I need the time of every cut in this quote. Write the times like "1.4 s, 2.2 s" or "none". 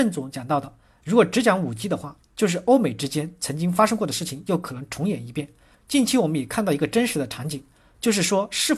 5.7 s